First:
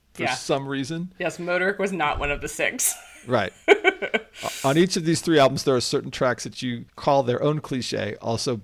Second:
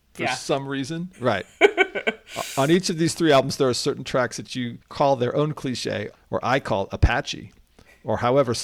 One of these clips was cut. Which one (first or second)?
second